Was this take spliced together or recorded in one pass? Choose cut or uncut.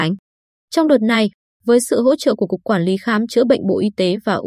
uncut